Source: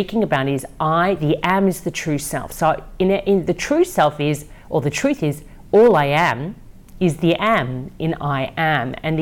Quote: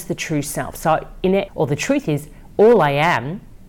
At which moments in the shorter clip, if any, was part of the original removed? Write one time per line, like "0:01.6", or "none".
0:01.5